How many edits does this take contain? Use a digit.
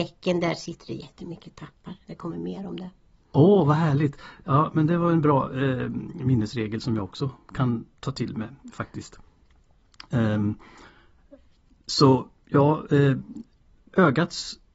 0